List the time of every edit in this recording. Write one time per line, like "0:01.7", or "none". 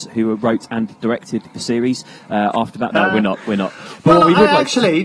0:02.9